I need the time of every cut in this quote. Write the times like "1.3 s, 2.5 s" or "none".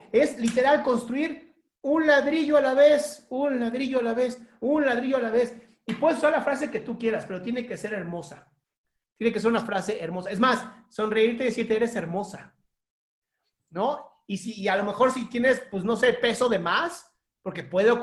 none